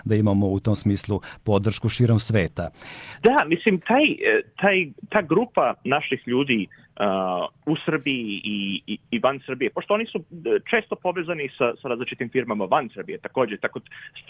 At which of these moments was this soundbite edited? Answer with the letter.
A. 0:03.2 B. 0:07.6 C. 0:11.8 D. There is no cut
A